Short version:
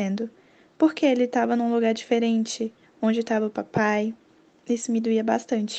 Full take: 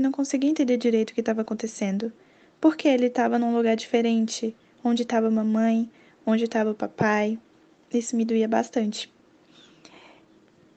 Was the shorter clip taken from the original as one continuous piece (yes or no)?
no